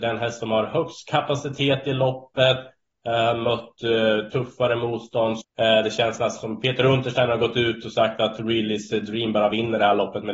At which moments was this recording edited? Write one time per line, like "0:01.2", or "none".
0:05.4